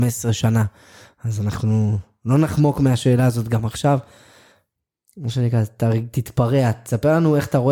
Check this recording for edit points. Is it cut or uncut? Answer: uncut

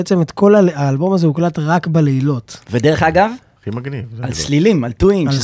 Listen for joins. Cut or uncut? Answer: uncut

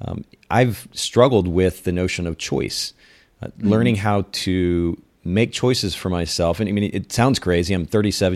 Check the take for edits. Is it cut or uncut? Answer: uncut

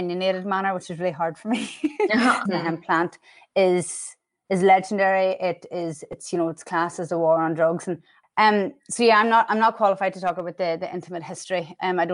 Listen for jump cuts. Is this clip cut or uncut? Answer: cut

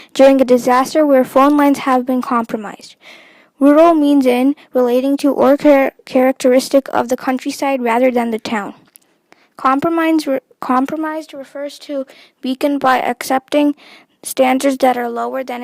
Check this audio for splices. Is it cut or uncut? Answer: uncut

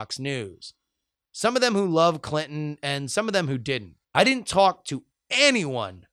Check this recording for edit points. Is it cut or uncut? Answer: cut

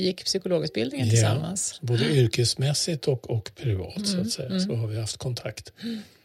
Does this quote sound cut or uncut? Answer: uncut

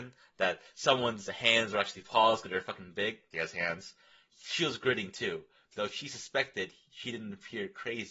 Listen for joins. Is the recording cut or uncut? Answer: cut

